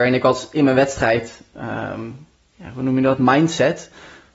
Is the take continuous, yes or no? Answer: yes